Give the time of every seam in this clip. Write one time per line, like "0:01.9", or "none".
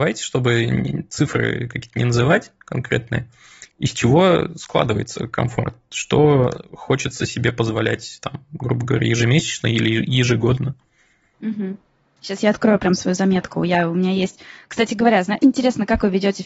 0:15.4